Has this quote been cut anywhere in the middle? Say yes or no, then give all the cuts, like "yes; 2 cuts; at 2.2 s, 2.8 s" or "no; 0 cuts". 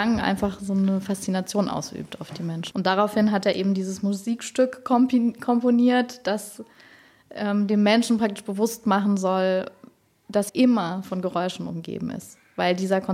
yes; 2 cuts; at 2.7 s, 10.5 s